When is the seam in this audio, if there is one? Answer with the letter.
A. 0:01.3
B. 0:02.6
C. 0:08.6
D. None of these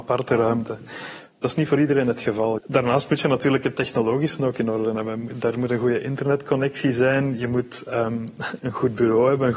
B